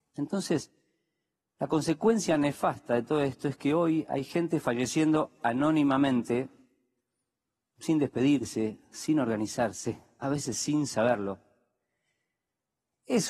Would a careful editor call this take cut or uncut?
uncut